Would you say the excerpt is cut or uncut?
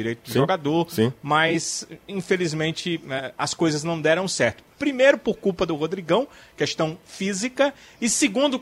uncut